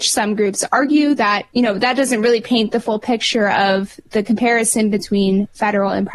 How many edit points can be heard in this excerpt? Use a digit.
1